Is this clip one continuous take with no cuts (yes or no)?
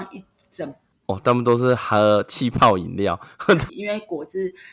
no